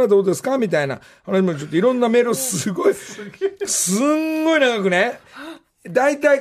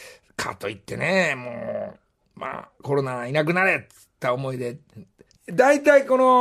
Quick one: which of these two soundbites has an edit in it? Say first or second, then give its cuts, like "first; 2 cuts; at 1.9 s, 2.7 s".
second; 1 cut; at 5.4 s